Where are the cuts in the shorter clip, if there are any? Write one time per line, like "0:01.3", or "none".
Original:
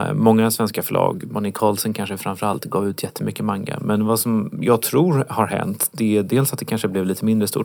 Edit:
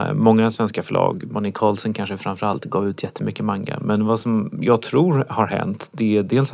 none